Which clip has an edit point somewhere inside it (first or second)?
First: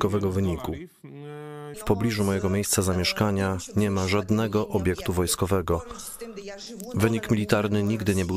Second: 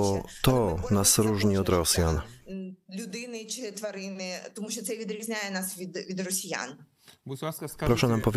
first